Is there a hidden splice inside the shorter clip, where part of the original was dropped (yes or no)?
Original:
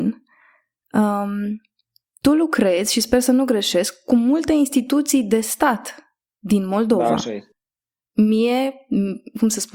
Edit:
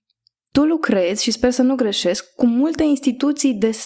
no